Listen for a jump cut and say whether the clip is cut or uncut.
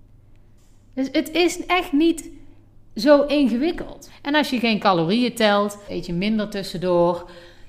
cut